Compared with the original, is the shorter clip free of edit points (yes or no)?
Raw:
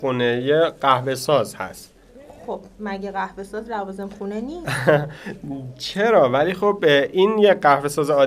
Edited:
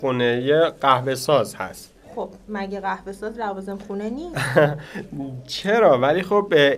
no